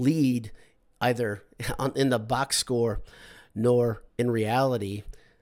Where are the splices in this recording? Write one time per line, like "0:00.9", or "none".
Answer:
0:04.1